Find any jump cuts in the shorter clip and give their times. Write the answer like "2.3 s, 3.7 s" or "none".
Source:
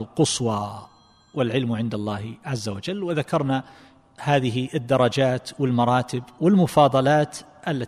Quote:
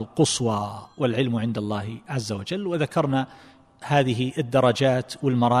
0.9 s